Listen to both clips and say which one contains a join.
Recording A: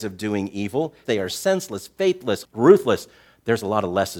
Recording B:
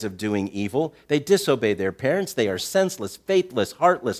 A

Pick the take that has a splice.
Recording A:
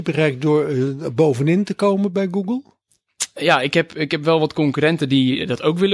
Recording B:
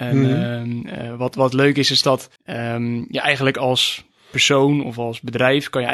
B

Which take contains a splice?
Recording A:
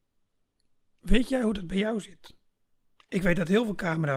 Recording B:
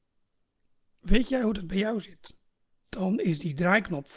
B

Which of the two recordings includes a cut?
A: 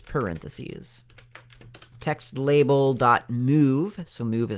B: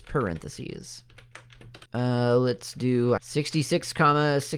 B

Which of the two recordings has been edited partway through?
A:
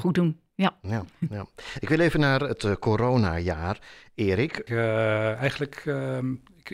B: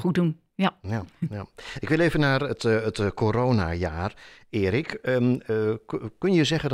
A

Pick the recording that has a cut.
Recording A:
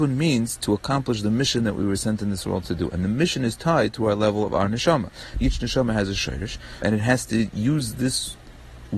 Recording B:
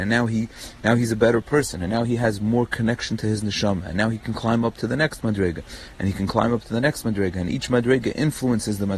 A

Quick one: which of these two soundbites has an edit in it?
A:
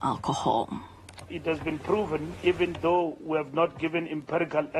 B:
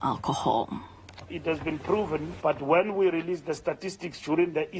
B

